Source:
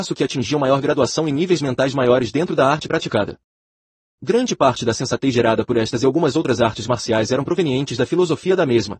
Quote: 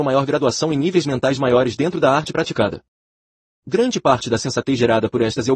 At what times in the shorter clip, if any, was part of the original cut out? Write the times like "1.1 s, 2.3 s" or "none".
none